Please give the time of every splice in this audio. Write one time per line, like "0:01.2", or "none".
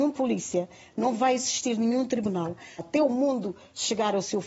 0:02.8